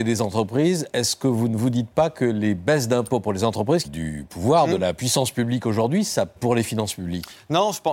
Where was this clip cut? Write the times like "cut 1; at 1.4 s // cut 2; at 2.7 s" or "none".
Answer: cut 1; at 3.8 s // cut 2; at 6.4 s